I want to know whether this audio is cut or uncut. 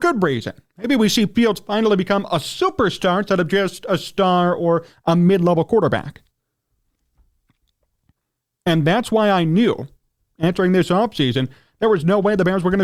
cut